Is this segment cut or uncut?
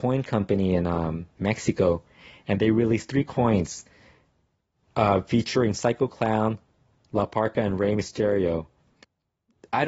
uncut